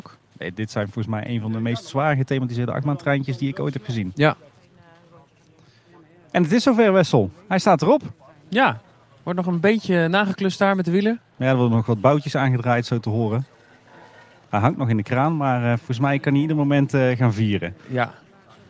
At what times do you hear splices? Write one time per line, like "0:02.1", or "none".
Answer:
none